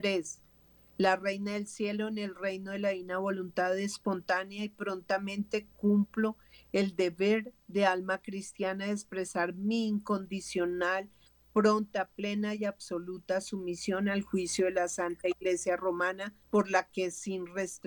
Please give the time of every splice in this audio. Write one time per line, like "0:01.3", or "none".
0:16.4